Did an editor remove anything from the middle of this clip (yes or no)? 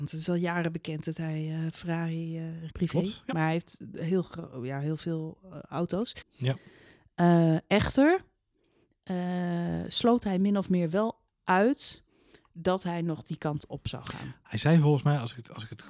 yes